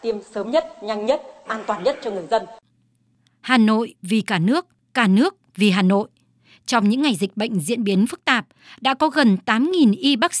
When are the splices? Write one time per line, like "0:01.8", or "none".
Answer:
none